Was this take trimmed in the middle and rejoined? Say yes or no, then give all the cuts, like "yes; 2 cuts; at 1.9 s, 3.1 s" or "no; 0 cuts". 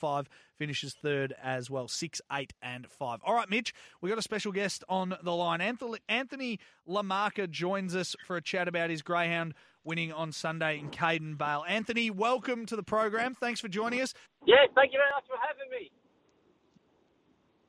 yes; 1 cut; at 14.3 s